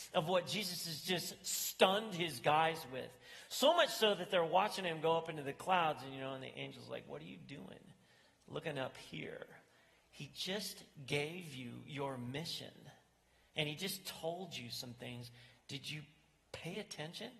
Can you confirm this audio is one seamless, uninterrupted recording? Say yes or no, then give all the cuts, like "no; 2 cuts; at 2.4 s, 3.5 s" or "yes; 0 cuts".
yes; 0 cuts